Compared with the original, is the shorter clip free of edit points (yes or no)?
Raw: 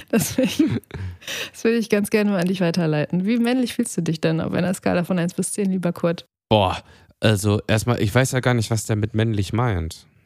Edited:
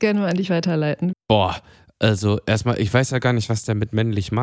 no